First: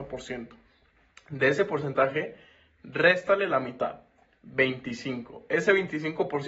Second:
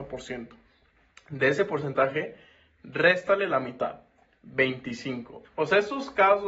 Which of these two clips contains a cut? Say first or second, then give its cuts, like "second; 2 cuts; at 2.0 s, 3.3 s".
second; 1 cut; at 5.4 s